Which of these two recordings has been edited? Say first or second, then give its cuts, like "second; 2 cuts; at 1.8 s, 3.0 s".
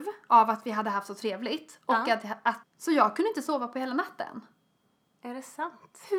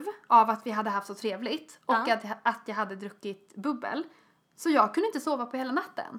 first; 1 cut; at 2.6 s